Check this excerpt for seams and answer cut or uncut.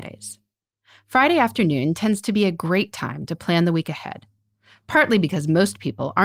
uncut